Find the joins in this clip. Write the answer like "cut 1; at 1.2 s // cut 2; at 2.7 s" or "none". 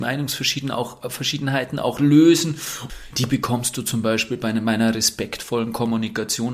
cut 1; at 3.1 s